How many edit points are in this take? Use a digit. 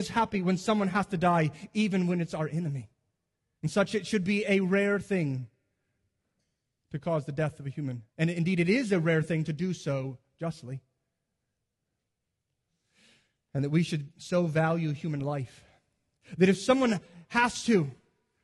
2